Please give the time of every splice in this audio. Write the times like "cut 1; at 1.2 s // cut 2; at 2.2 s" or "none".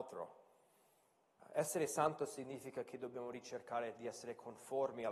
cut 1; at 1.4 s